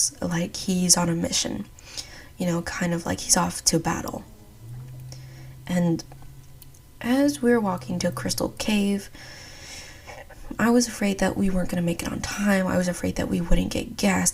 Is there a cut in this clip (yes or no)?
no